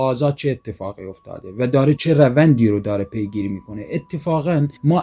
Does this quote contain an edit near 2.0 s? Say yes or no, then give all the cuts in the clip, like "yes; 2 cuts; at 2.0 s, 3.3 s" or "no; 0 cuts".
yes; 1 cut; at 2.0 s